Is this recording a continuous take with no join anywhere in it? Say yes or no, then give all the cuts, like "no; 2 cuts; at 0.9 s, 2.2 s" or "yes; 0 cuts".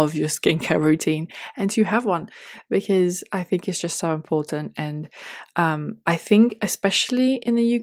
yes; 0 cuts